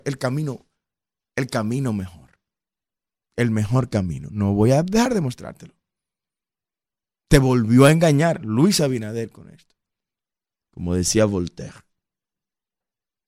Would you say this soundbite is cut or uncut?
cut